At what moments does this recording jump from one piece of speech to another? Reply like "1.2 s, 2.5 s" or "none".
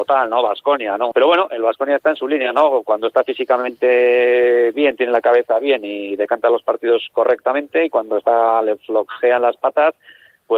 1.1 s